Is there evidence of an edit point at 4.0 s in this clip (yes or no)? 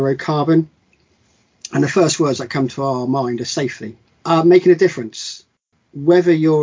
yes